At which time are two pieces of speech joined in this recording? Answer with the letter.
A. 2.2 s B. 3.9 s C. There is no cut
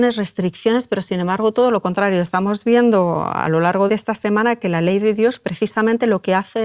B